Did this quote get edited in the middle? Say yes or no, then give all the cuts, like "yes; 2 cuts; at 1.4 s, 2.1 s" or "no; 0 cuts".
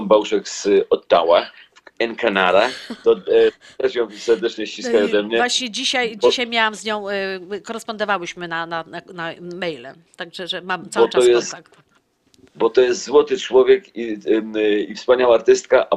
no; 0 cuts